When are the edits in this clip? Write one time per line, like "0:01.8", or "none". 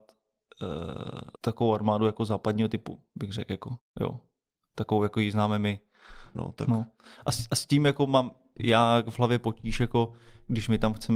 0:01.4
0:06.3